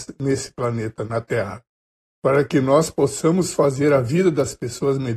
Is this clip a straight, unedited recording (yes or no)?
yes